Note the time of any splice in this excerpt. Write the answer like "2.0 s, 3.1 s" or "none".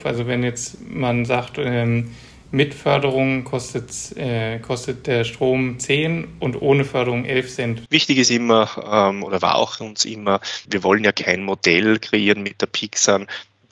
7.9 s, 10.7 s